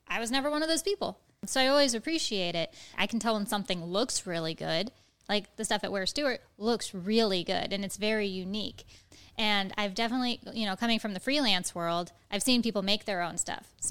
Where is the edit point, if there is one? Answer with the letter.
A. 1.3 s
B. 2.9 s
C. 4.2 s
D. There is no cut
B